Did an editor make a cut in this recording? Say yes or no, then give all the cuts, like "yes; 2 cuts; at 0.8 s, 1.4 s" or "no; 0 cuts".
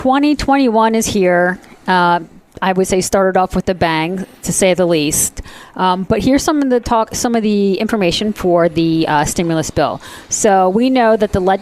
no; 0 cuts